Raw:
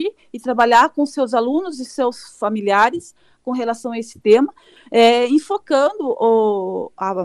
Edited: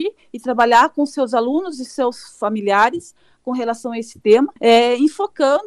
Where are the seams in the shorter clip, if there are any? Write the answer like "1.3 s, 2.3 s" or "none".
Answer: 4.6 s